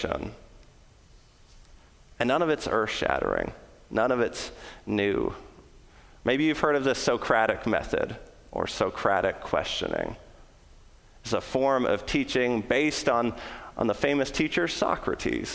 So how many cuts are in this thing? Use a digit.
0